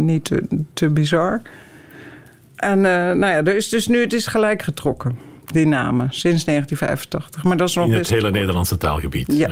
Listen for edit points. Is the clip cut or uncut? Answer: uncut